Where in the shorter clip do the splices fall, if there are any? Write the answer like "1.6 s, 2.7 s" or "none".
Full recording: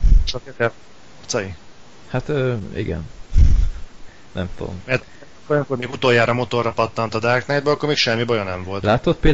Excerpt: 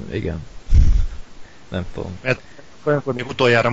none

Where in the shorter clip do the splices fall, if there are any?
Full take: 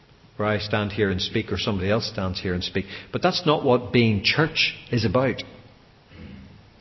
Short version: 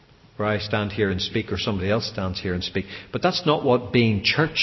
none

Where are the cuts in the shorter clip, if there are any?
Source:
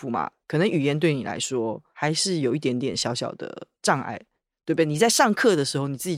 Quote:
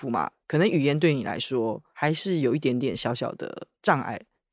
none

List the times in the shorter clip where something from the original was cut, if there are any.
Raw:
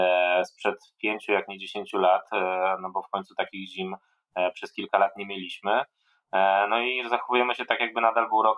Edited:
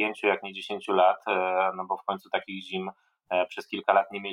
none

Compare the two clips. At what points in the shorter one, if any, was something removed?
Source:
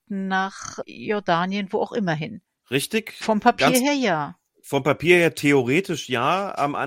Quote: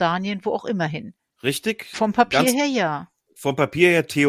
none

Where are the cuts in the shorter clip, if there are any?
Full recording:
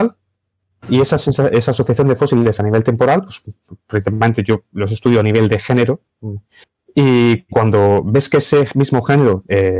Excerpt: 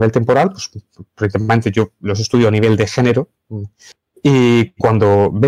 none

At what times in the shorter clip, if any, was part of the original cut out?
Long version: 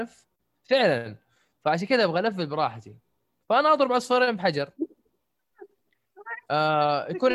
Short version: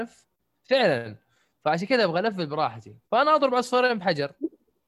3.0 s

